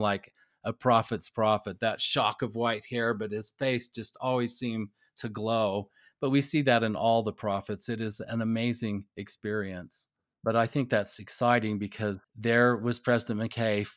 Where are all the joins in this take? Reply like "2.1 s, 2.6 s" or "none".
10.3 s, 12.2 s